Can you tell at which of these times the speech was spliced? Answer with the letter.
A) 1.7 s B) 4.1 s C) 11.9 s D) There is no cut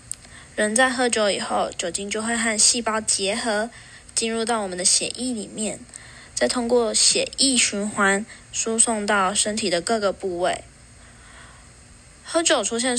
D